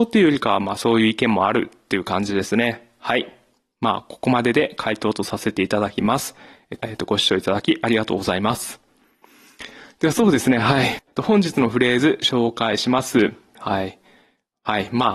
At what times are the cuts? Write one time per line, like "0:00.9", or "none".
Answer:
0:06.8
0:11.0
0:13.5